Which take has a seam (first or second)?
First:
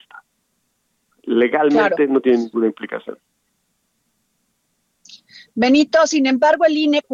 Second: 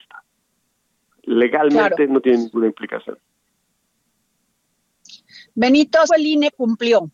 second